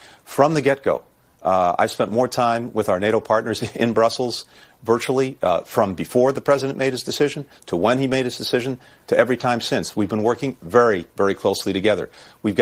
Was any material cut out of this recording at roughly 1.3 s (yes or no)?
no